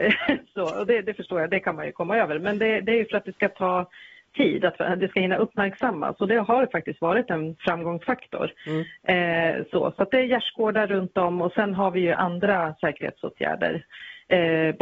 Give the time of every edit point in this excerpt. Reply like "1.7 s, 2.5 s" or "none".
none